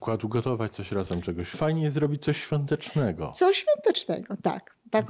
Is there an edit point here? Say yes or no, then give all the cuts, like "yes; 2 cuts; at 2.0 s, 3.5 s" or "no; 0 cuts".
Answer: yes; 1 cut; at 1.5 s